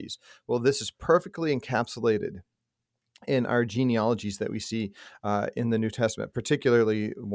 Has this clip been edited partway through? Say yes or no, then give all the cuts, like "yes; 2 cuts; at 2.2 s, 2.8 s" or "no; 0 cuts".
no; 0 cuts